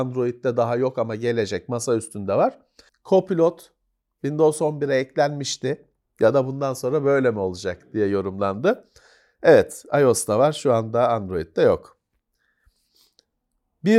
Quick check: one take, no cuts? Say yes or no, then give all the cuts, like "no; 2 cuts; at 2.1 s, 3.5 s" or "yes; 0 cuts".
no; 2 cuts; at 2.9 s, 6.0 s